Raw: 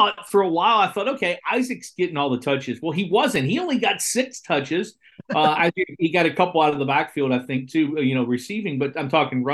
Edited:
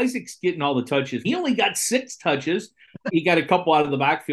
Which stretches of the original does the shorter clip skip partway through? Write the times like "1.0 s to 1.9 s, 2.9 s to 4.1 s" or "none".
2.8 s to 3.5 s, 5.3 s to 6.0 s